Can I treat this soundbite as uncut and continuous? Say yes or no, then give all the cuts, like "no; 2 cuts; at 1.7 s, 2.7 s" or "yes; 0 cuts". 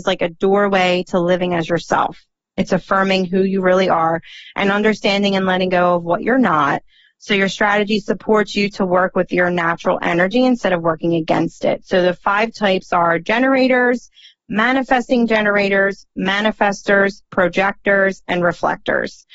yes; 0 cuts